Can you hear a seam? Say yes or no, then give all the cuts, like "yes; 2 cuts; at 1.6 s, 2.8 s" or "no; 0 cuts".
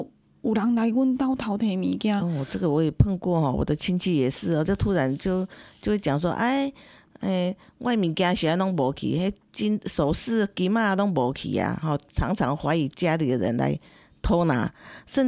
no; 0 cuts